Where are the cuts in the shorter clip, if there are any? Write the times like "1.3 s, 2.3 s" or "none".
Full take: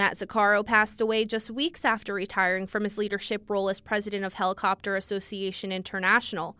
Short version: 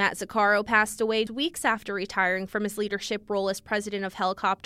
1.3 s